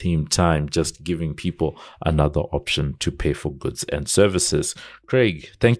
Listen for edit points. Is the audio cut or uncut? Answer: uncut